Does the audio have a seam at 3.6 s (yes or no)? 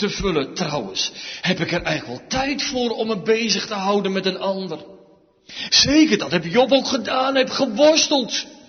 no